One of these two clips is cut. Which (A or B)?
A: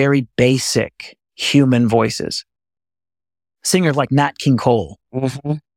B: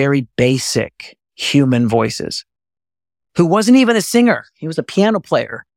B